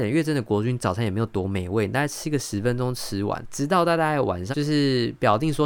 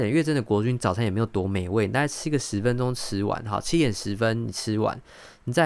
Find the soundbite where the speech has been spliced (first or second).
first